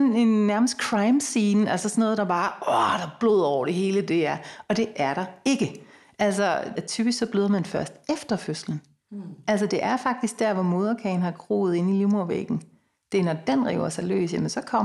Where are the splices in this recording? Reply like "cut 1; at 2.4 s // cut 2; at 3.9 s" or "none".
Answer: cut 1; at 6.8 s

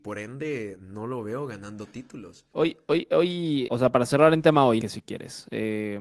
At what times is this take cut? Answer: cut 1; at 3.7 s // cut 2; at 4.8 s

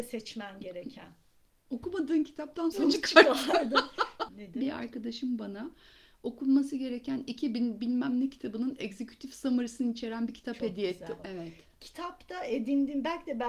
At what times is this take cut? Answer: cut 1; at 2.7 s // cut 2; at 4.3 s // cut 3; at 11.2 s

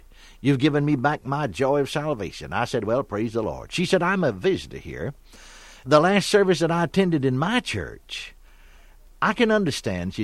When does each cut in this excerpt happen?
none

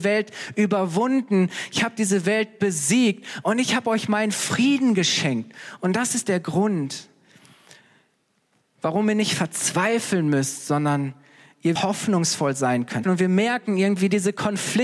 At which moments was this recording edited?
cut 1; at 11.8 s // cut 2; at 13.0 s

